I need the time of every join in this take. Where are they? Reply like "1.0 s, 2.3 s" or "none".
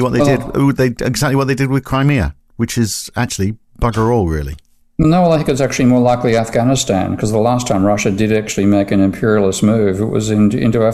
none